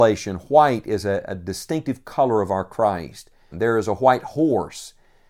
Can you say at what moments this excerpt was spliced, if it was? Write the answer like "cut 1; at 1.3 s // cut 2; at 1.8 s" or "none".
cut 1; at 3.5 s